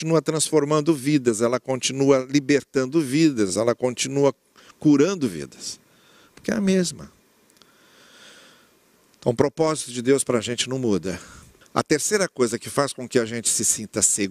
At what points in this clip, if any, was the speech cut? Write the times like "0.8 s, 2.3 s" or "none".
11.6 s